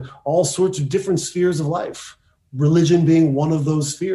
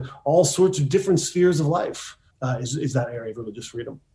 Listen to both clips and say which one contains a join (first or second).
second